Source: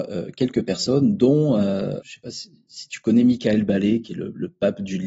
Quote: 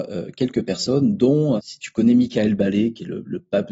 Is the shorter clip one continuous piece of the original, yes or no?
no